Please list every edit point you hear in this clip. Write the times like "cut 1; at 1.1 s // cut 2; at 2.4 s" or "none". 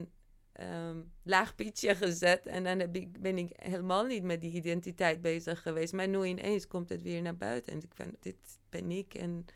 cut 1; at 8.2 s